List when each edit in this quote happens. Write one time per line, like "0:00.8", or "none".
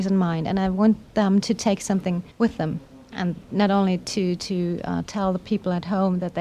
0:02.3